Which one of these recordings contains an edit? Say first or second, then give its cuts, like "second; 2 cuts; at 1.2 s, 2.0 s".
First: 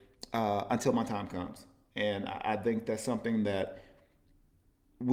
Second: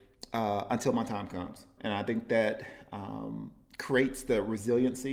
second; 1 cut; at 1.8 s